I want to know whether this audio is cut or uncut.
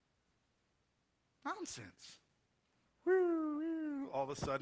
cut